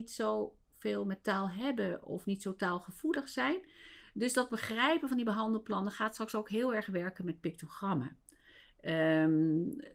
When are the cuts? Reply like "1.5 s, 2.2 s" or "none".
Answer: none